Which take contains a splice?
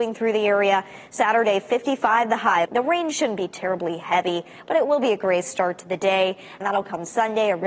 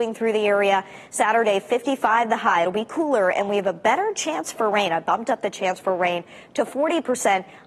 first; 2 cuts; at 2.6 s, 6.6 s

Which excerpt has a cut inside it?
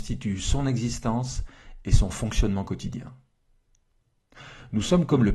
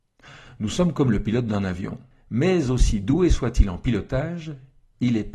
second; 1 cut; at 2.1 s

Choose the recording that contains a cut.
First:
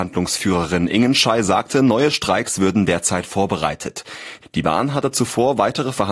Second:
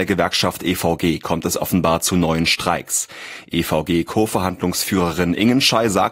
first; 1 cut; at 4.4 s

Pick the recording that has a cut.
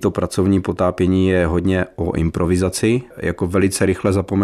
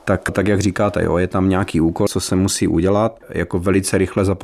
second; 2 cuts; at 2.1 s, 3.2 s

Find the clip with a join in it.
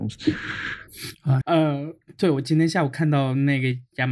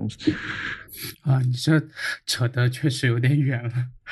first; 1 cut; at 1.4 s

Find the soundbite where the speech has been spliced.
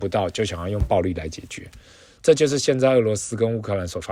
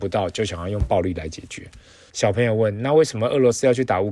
second; 1 cut; at 2.1 s

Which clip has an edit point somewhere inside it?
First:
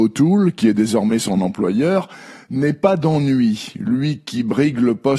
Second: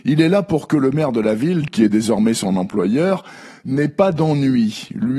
second; 1 cut; at 1.7 s

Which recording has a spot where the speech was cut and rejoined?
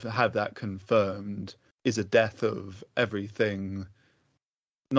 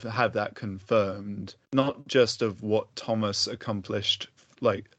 second; 1 cut; at 1.6 s

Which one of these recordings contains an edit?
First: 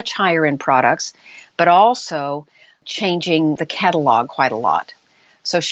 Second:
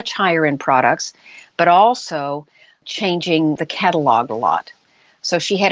second; 1 cut; at 4.3 s

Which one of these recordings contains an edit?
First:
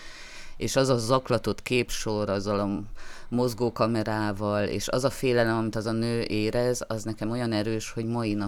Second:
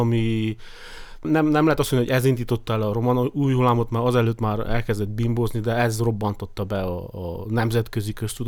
second; 1 cut; at 1.2 s

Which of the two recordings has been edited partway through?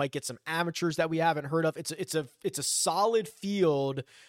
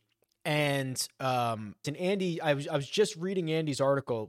second; 1 cut; at 1.8 s

